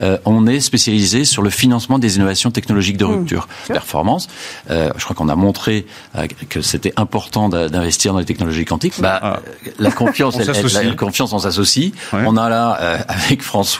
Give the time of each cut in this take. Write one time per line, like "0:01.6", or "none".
0:03.7
0:08.9